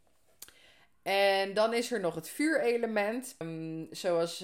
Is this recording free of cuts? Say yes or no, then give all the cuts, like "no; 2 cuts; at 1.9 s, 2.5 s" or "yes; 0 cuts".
no; 1 cut; at 3.4 s